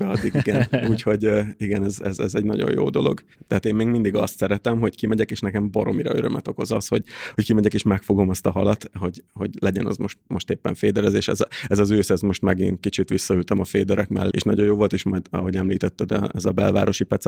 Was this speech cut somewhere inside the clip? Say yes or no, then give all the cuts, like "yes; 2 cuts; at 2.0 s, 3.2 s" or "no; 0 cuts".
yes; 2 cuts; at 3.5 s, 14.3 s